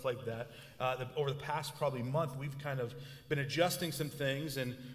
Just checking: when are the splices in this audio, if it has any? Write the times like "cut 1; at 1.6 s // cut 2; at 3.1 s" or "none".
none